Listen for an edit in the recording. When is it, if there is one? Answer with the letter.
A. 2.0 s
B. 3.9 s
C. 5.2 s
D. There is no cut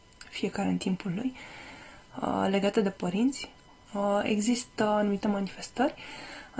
B